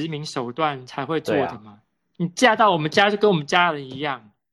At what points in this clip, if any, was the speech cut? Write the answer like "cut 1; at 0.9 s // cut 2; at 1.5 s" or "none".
none